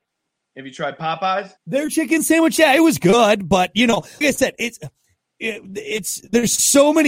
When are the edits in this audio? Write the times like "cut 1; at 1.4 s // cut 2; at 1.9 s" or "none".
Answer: cut 1; at 1.6 s // cut 2; at 4.2 s

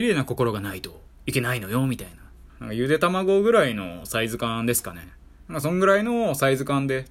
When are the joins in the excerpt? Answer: cut 1; at 2.5 s

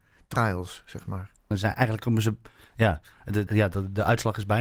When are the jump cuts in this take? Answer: cut 1; at 1.5 s // cut 2; at 3.5 s

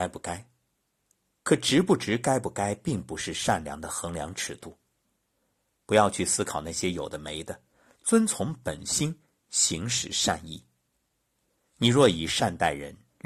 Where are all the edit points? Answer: none

